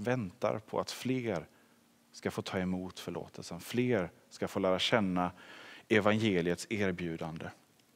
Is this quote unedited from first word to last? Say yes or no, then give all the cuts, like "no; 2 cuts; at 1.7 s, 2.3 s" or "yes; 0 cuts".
yes; 0 cuts